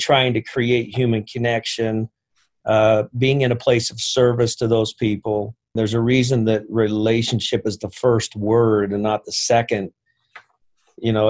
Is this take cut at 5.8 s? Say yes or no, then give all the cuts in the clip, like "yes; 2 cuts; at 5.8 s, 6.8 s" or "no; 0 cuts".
yes; 1 cut; at 5.8 s